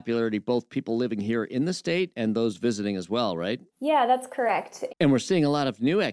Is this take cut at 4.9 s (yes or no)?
yes